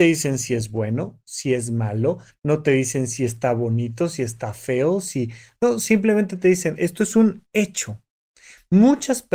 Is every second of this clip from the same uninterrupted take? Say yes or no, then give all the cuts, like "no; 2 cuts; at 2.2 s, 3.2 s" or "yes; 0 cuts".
yes; 0 cuts